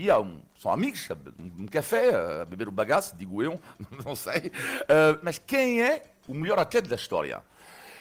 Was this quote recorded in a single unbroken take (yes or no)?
no